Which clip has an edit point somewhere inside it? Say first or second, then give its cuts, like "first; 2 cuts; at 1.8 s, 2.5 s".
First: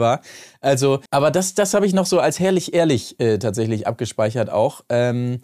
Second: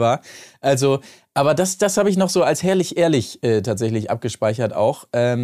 first; 1 cut; at 1.1 s